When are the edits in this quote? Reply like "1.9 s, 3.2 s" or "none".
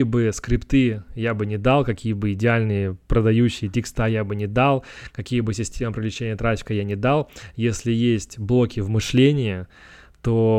none